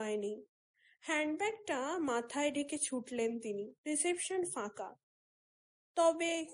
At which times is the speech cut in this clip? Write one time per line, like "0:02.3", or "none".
0:03.8